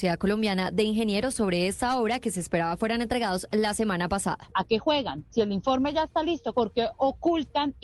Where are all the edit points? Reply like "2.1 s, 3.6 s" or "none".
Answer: 4.5 s, 6.5 s